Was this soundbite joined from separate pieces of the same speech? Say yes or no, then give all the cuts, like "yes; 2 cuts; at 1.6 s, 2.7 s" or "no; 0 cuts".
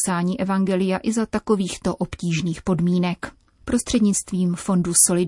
yes; 1 cut; at 3.6 s